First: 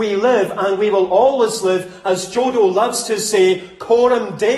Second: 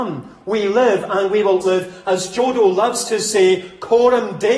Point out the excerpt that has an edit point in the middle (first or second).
second